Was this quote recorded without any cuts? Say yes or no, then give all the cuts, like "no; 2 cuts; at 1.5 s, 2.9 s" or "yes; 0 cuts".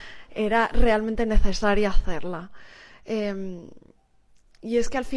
yes; 0 cuts